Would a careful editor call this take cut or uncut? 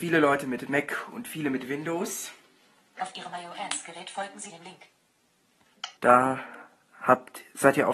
cut